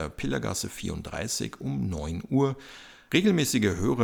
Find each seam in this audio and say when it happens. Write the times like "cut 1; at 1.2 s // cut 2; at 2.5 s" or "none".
cut 1; at 3.1 s